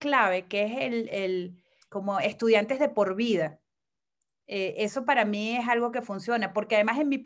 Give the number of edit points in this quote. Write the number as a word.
one